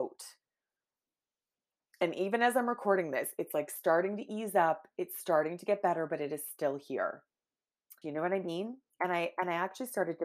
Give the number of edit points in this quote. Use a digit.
1